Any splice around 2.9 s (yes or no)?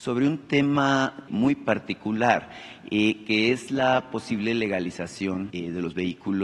no